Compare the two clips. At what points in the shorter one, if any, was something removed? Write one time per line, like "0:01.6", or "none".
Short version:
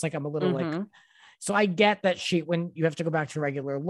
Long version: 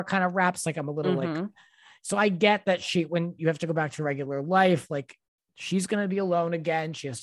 none